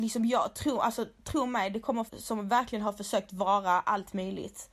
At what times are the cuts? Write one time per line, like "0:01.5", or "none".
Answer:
0:02.1

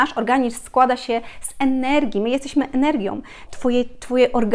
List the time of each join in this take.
0:03.5

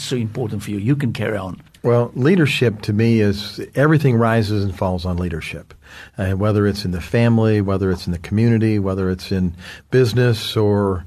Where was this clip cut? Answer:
none

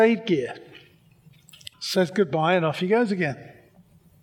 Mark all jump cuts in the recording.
0:01.7

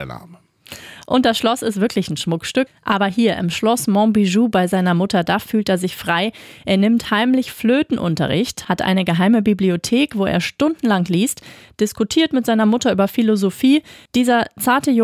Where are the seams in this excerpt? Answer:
0:02.7

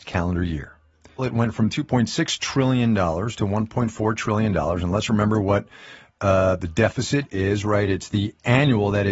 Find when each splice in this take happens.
0:01.2

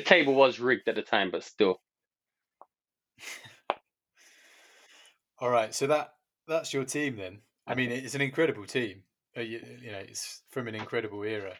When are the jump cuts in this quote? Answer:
none

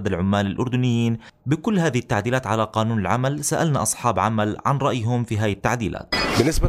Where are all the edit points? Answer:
0:01.4

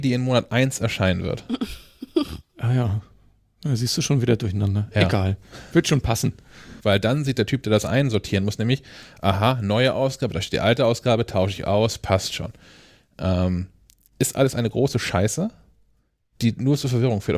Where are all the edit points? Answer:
0:06.8

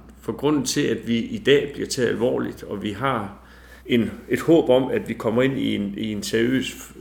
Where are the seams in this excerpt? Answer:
0:03.8

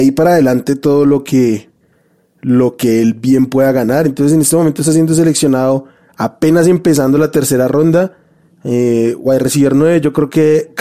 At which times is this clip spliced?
none

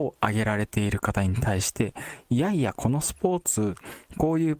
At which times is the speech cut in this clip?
none

